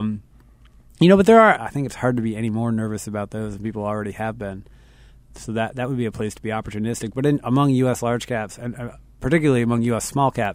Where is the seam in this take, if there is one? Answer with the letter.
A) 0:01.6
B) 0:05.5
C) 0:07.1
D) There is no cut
A